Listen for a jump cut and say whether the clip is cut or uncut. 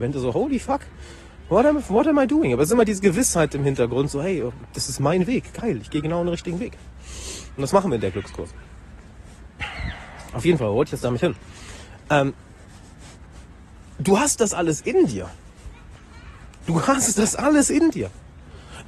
uncut